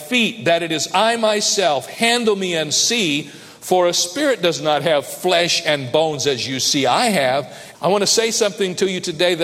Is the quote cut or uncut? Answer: cut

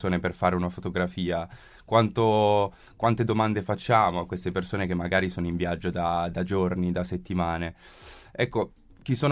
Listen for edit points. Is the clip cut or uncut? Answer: uncut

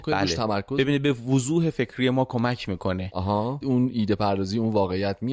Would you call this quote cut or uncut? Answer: cut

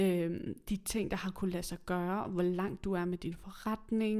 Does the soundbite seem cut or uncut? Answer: uncut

